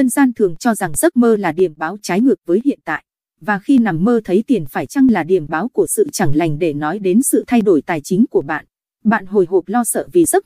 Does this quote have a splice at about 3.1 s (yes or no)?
no